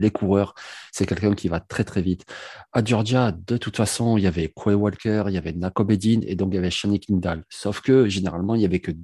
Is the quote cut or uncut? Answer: uncut